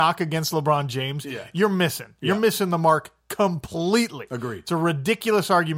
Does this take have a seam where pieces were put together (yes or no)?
no